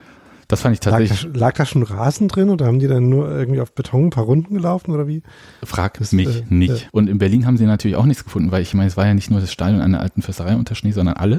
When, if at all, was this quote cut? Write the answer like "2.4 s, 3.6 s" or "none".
6.9 s

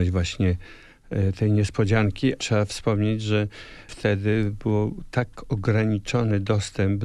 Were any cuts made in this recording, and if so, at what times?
2.4 s

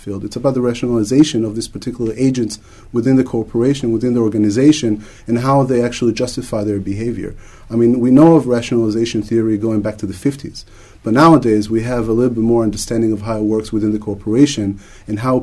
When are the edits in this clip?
none

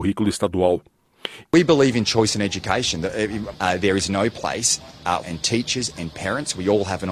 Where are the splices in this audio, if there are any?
1.4 s, 3.5 s, 5.2 s

